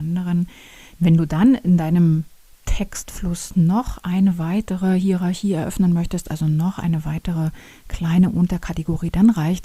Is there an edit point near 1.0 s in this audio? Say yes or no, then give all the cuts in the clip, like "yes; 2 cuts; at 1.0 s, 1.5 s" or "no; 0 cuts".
yes; 1 cut; at 1.0 s